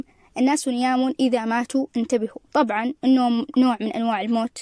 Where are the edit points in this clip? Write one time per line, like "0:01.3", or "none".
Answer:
0:02.5